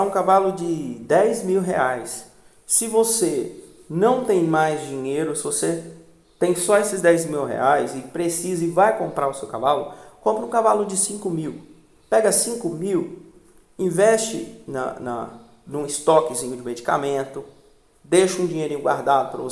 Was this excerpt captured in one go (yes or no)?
yes